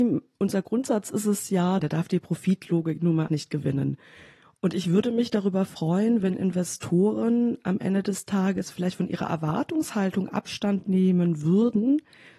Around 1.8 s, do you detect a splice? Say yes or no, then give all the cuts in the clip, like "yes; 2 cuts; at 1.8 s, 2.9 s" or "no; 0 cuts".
yes; 2 cuts; at 1.8 s, 3.3 s